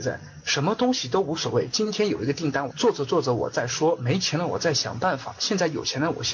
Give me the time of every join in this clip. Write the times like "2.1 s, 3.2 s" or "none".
2.7 s